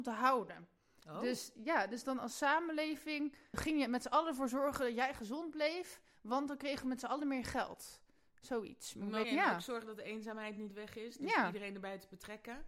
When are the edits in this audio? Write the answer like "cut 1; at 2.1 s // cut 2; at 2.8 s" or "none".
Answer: cut 1; at 3.5 s // cut 2; at 9.2 s

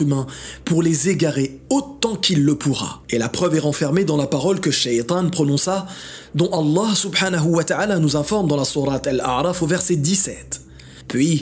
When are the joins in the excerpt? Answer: cut 1; at 3.0 s

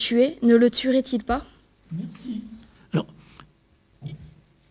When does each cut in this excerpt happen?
cut 1; at 2.7 s

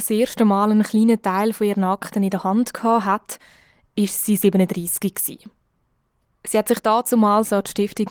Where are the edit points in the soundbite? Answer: none

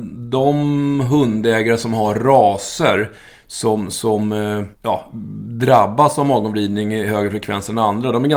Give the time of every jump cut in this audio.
cut 1; at 4.7 s

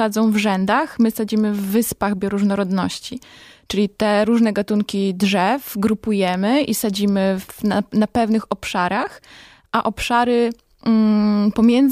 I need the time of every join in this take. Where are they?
none

